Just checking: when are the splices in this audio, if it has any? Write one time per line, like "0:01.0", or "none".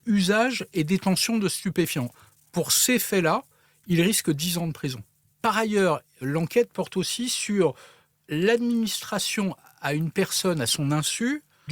none